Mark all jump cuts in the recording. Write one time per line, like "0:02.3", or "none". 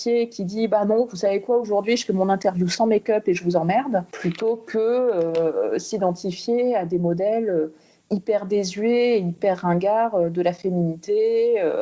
none